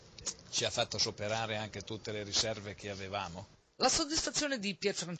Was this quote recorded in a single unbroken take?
yes; 0 cuts

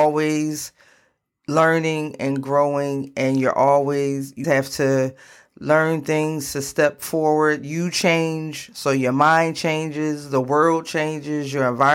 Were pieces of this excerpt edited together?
yes; 1 cut; at 4.4 s

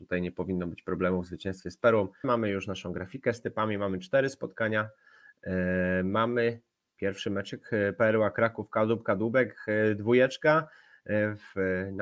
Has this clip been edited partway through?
yes; 1 cut; at 2.2 s

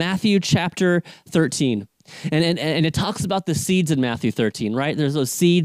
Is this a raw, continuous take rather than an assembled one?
yes; 0 cuts

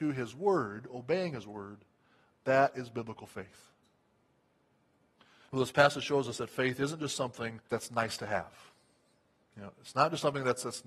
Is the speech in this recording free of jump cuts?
no; 2 cuts; at 5.4 s, 7.6 s

